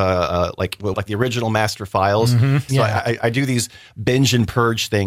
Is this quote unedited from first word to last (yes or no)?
no